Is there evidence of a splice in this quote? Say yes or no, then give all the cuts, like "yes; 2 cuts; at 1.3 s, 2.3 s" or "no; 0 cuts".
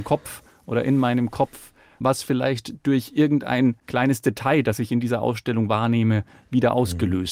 no; 0 cuts